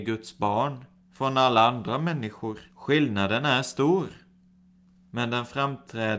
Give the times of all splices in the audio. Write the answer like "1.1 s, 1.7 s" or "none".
2.7 s